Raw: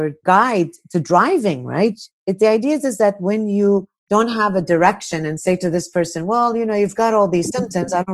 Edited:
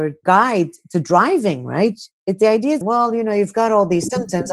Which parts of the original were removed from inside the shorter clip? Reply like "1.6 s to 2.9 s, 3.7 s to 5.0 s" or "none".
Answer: 2.8 s to 6.2 s